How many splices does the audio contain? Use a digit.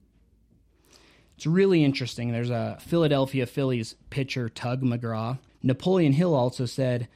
2